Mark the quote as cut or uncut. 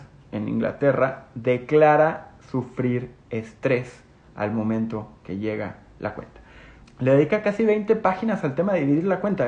cut